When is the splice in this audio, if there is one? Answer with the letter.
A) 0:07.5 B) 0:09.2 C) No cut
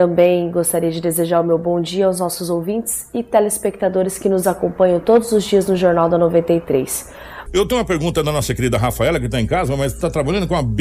A